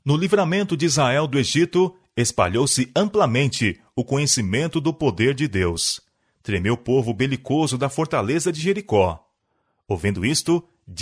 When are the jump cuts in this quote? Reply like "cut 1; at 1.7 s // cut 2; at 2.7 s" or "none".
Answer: none